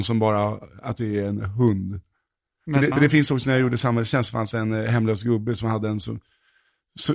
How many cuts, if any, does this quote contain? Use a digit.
1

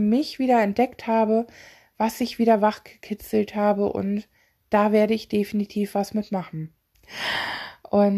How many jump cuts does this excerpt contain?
1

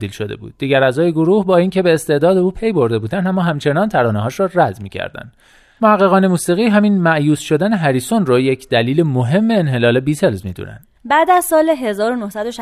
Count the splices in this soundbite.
1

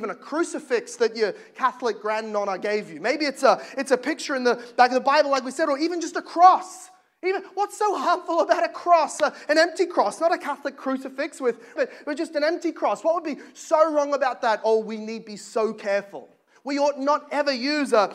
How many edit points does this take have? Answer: 2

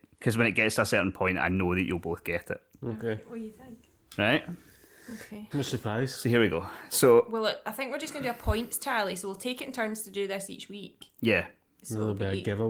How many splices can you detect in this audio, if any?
1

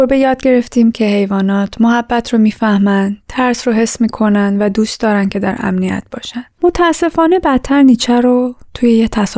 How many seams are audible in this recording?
1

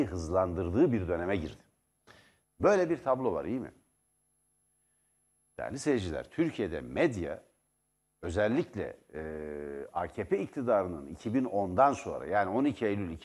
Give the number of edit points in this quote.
1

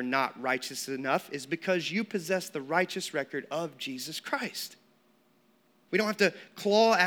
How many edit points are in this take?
1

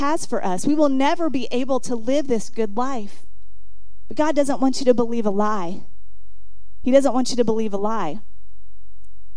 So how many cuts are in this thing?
0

